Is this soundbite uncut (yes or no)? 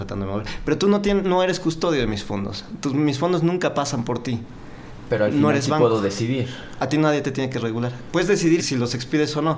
no